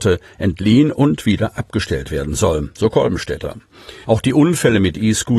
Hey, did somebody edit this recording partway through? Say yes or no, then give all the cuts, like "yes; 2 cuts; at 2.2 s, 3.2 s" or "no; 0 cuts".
yes; 1 cut; at 4.0 s